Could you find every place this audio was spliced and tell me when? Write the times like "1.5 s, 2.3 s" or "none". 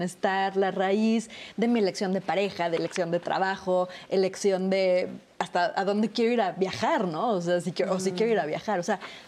none